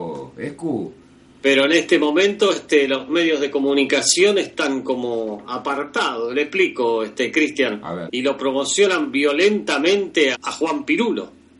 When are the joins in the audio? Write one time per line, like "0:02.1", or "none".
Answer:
0:08.1
0:10.3